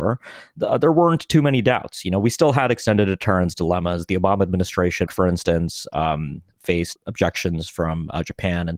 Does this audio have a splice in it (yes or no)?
yes